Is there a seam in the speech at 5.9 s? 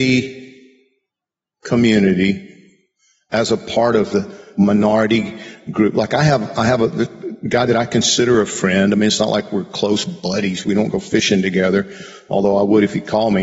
no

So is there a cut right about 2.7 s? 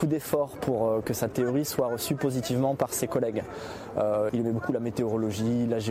no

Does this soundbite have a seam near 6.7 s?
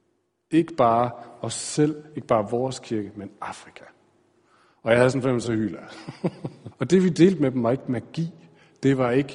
yes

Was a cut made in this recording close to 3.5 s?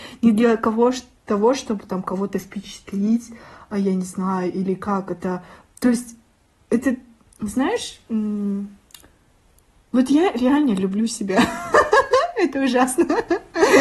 no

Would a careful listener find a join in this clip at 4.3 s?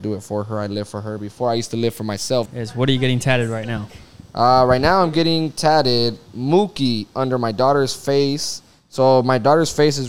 no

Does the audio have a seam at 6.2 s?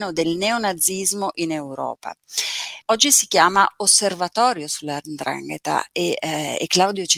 no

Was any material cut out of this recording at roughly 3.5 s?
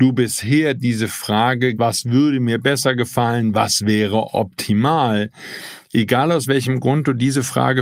no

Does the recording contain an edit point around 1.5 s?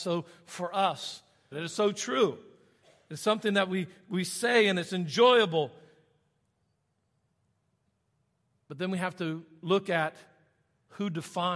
yes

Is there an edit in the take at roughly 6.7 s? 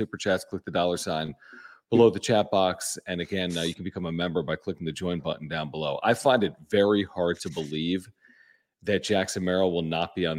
no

